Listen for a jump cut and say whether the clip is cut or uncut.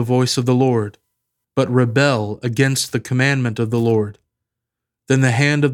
uncut